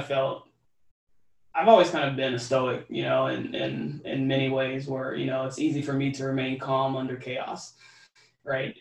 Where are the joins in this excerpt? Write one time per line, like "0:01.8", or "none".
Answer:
none